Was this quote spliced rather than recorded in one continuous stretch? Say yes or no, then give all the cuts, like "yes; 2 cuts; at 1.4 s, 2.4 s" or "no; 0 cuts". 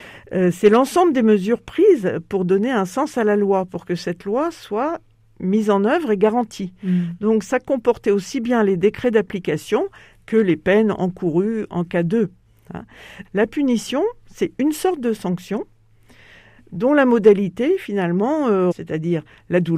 yes; 2 cuts; at 13.2 s, 18.7 s